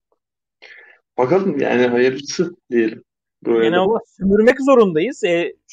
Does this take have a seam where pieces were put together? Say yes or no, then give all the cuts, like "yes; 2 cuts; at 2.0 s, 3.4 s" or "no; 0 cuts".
yes; 1 cut; at 3.8 s